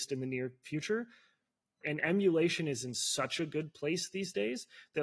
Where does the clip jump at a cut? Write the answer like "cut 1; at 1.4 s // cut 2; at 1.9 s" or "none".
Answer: cut 1; at 1.8 s